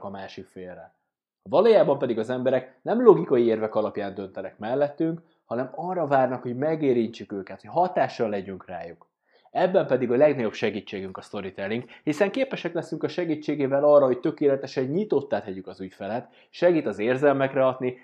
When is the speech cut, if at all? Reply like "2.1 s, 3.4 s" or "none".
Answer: none